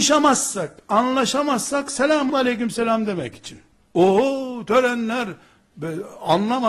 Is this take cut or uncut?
cut